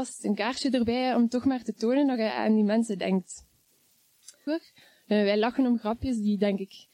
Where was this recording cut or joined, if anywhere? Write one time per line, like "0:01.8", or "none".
0:04.5